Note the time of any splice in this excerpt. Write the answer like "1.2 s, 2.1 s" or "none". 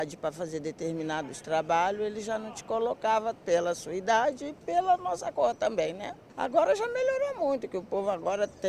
none